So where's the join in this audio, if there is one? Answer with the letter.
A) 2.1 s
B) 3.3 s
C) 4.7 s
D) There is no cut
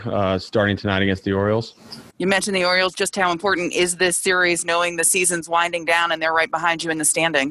A